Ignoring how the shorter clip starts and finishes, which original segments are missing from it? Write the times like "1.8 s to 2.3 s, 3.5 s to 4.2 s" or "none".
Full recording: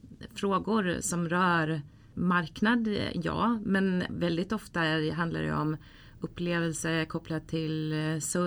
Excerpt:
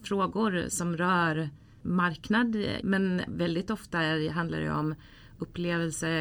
3.1 s to 3.6 s